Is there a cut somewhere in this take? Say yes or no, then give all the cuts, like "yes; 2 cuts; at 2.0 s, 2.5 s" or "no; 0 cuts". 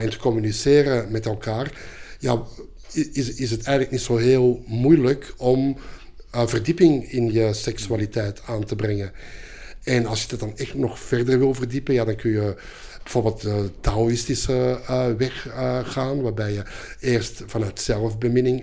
no; 0 cuts